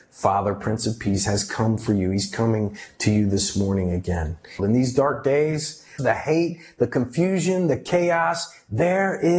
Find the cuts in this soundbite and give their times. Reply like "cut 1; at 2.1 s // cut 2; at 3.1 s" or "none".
cut 1; at 4.6 s // cut 2; at 6.0 s